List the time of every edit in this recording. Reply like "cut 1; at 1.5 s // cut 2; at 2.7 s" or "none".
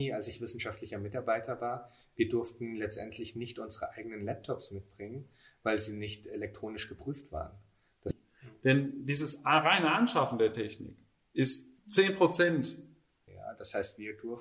cut 1; at 8.1 s // cut 2; at 11.8 s // cut 3; at 13.3 s